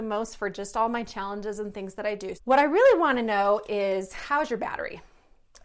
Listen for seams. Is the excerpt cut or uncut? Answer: cut